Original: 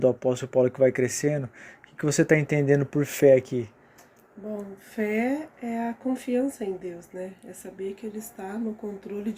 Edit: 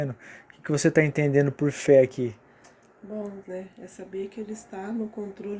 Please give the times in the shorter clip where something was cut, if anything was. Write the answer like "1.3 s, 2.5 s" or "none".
3.4 s